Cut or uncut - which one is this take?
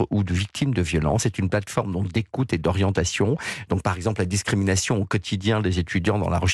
uncut